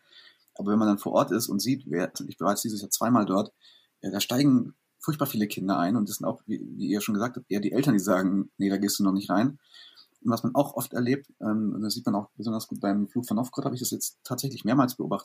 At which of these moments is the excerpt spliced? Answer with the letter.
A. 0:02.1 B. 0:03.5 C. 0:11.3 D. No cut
A